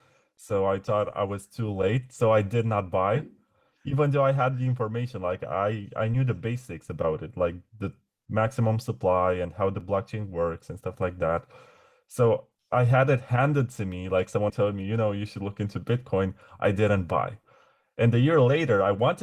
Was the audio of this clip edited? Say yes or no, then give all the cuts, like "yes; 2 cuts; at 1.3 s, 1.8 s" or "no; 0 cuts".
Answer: yes; 1 cut; at 14.5 s